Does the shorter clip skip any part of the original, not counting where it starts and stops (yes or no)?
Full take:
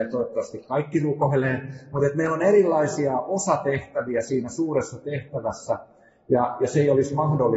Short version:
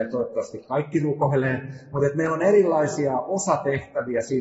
no